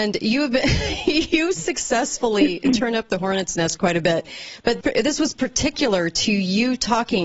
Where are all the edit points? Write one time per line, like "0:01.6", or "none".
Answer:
0:04.8

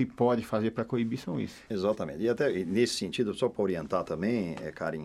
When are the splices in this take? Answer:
0:01.7

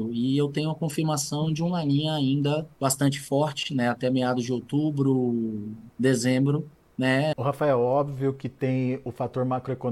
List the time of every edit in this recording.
0:02.7
0:05.9
0:07.3

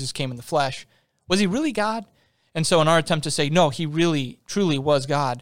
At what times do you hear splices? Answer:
none

